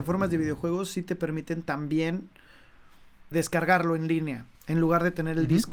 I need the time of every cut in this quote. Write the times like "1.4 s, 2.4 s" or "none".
3.3 s, 4.5 s